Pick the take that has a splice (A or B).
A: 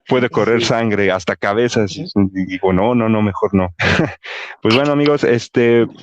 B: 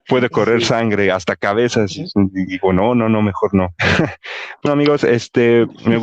B